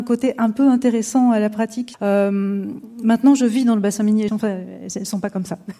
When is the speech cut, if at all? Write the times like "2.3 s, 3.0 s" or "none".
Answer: 1.9 s, 4.3 s